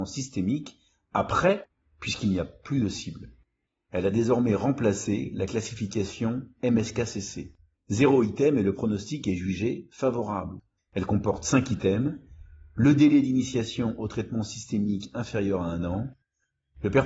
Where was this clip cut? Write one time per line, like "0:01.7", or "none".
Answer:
0:03.9
0:07.7
0:10.8